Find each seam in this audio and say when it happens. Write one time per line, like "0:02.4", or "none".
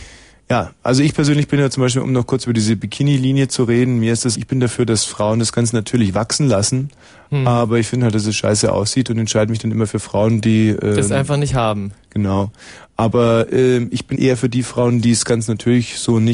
0:04.3
0:14.1